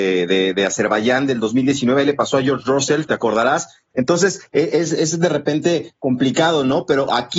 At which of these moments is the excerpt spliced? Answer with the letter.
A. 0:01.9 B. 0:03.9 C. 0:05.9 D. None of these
B